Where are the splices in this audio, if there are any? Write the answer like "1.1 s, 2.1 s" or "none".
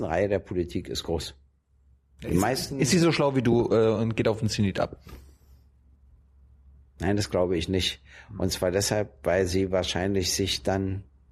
none